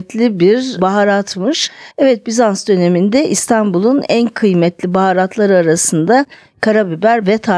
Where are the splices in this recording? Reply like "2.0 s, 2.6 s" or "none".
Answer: 1.9 s